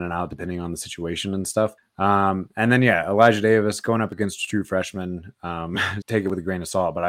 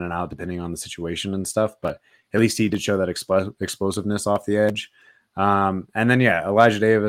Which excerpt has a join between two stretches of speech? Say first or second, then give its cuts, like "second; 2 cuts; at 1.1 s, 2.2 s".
first; 2 cuts; at 1.8 s, 6.0 s